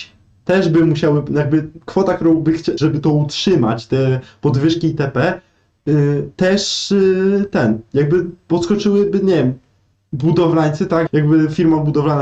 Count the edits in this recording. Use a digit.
2